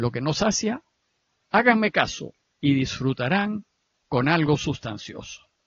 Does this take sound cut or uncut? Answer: cut